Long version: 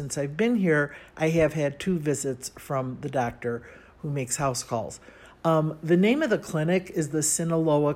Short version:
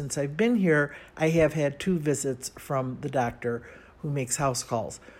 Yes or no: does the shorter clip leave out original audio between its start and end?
no